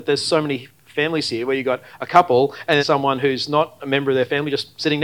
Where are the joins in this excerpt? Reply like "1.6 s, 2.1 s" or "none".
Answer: 2.8 s